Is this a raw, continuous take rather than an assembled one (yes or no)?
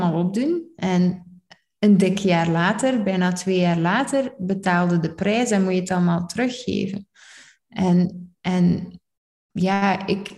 yes